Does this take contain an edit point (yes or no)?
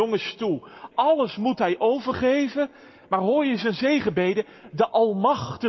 yes